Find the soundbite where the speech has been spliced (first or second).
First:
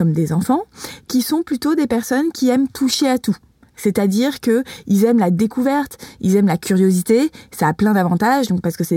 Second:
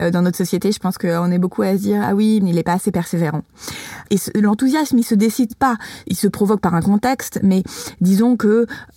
second